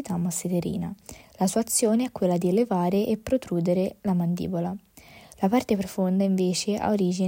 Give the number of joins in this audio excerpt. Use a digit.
1